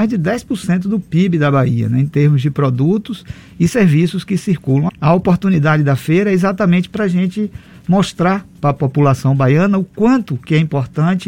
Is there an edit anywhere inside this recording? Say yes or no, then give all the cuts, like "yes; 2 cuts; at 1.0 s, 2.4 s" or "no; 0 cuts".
yes; 1 cut; at 4.9 s